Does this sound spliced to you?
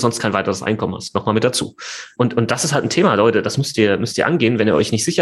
no; 0 cuts

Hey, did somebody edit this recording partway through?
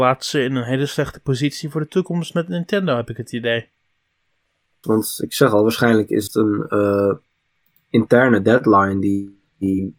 yes; 1 cut; at 4.8 s

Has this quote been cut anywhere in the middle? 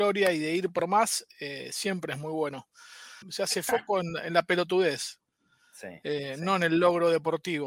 yes; 1 cut; at 3.2 s

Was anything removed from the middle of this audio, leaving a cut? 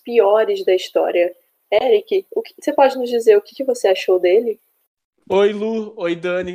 no; 0 cuts

